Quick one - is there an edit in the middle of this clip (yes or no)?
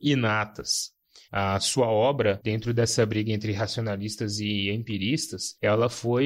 yes